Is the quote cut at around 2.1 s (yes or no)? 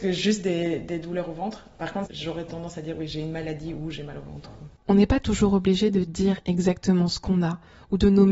yes